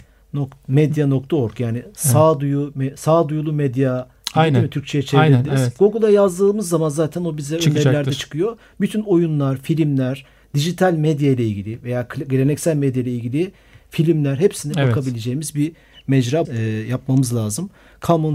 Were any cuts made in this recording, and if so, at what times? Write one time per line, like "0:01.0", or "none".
0:16.4